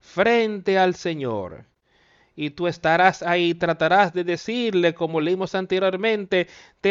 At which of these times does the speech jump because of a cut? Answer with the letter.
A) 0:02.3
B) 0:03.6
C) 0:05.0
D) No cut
D